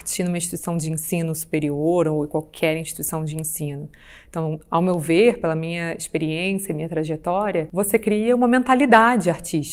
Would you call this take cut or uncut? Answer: uncut